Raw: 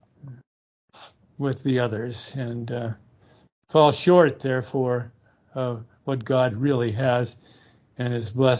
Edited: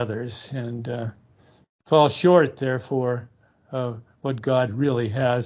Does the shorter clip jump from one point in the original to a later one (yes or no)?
no